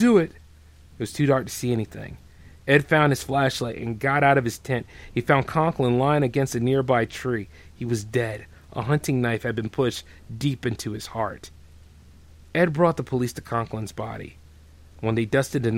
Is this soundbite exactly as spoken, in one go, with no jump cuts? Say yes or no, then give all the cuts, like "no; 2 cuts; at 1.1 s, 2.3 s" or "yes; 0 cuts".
yes; 0 cuts